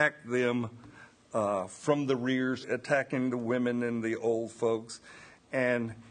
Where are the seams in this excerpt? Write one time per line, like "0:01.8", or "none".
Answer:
0:02.6